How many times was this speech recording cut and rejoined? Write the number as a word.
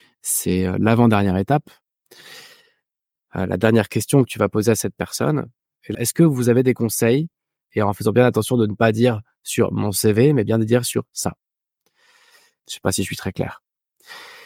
three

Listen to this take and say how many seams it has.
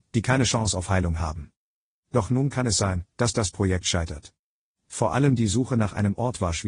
two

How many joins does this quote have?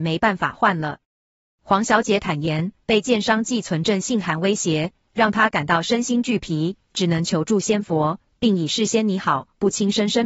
zero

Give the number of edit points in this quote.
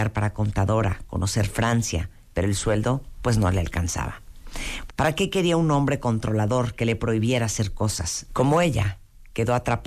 two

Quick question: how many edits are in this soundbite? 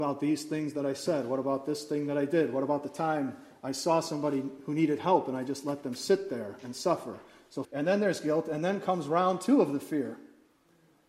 one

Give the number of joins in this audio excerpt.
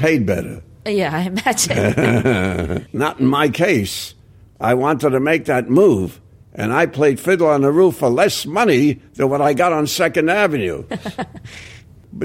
one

